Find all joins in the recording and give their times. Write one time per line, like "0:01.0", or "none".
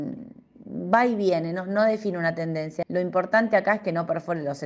0:02.8